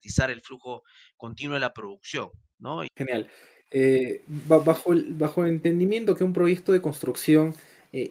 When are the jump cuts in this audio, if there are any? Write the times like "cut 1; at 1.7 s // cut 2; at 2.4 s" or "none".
cut 1; at 2.9 s